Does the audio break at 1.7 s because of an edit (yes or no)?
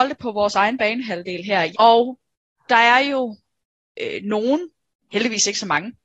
yes